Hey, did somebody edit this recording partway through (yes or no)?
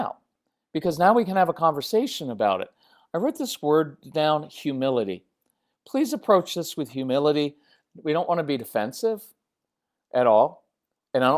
no